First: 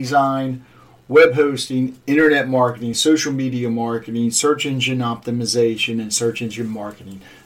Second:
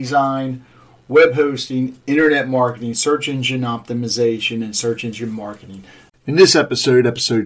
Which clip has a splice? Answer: second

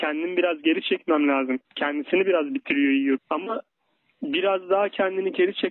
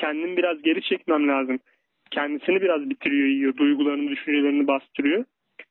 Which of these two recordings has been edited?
first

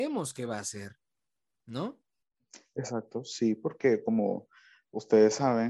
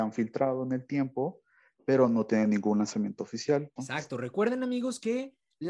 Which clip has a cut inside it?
second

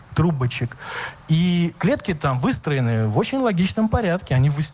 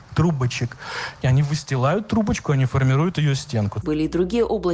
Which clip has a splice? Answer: second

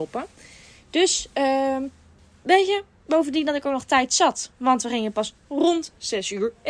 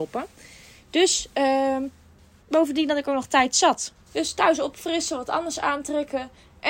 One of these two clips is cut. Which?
second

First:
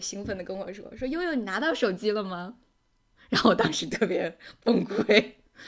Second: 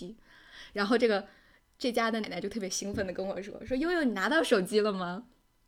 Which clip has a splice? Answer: second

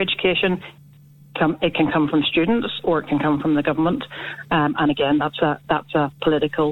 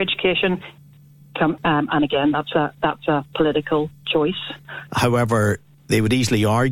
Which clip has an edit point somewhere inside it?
second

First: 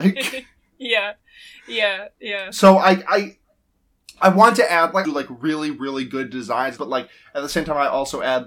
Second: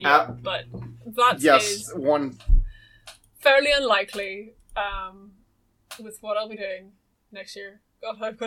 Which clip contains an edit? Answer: first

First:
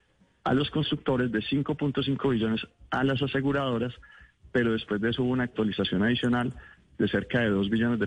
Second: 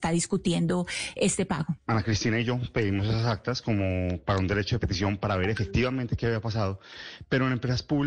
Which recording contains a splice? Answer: second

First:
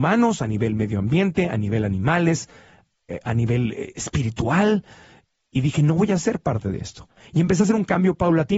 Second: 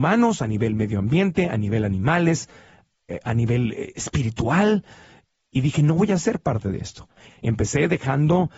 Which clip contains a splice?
second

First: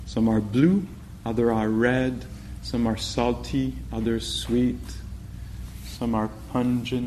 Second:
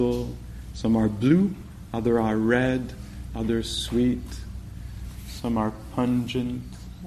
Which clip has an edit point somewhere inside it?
second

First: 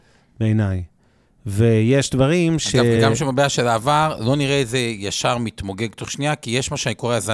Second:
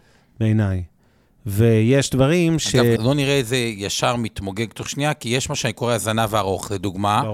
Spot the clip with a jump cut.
second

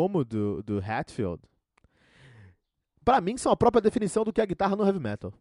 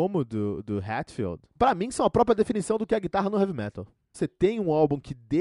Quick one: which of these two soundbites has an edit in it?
second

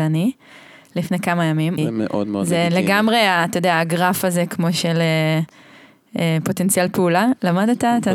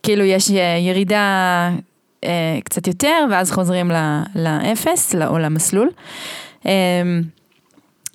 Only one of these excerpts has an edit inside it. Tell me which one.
first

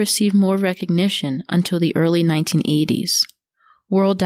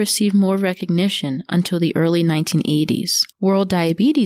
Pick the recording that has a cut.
second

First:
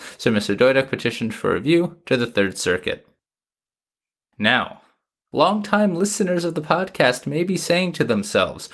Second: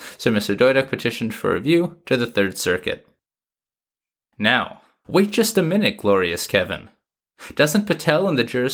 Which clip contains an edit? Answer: second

